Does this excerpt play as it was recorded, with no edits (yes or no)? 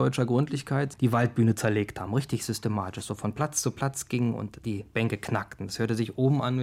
yes